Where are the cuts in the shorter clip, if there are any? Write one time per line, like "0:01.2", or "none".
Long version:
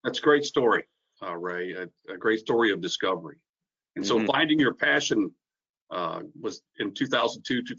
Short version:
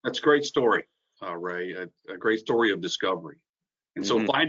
none